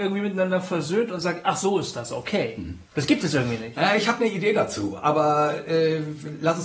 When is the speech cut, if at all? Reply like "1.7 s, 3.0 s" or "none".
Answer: 2.9 s